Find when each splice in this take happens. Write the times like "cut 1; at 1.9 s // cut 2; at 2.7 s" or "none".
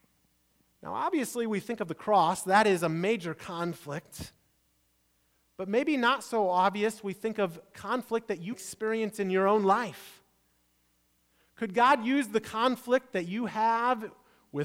cut 1; at 8.5 s